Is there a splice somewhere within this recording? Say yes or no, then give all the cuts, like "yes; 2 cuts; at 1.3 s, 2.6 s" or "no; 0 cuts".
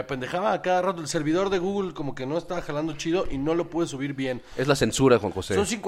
no; 0 cuts